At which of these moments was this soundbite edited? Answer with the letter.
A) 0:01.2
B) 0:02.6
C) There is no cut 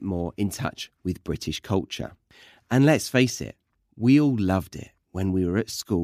C